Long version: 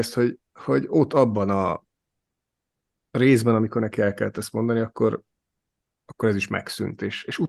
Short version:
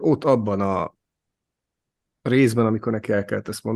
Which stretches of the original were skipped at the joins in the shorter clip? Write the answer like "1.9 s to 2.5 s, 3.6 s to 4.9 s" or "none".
none